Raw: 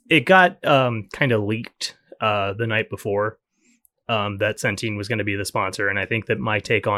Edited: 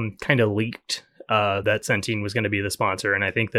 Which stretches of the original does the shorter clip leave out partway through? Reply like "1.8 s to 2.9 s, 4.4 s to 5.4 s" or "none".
2.5 s to 4.4 s